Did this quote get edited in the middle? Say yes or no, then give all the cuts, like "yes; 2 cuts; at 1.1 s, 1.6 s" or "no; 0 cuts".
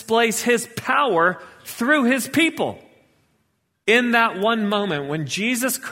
yes; 1 cut; at 3.8 s